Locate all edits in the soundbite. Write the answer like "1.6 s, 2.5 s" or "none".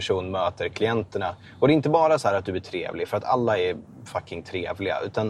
none